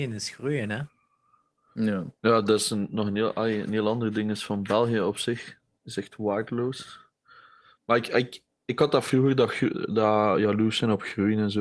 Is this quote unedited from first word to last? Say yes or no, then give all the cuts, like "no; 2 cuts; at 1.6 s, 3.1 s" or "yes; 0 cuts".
yes; 0 cuts